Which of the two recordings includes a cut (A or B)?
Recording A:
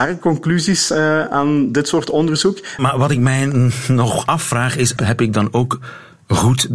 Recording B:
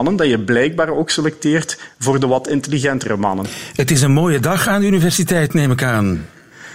A